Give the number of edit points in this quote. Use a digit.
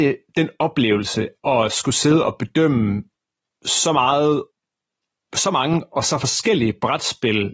0